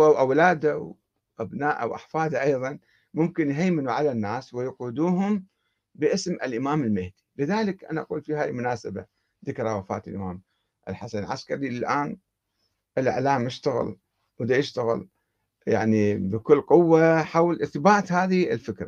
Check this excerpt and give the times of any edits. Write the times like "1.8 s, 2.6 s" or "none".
none